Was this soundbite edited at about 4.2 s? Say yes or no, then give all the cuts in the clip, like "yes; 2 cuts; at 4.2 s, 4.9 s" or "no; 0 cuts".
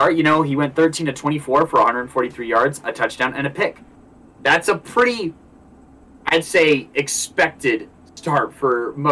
no; 0 cuts